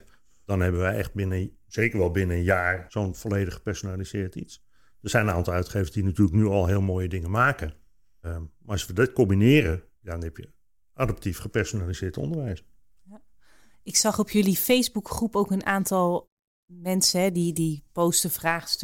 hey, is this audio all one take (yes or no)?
yes